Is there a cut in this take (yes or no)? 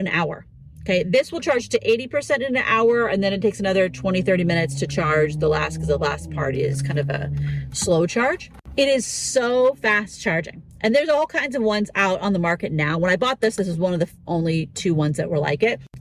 no